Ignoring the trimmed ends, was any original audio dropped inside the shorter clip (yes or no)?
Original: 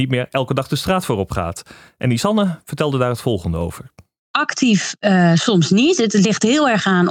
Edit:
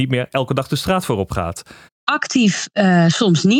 yes